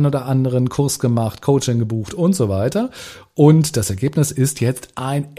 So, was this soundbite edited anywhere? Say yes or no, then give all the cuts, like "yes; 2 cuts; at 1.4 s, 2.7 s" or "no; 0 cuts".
no; 0 cuts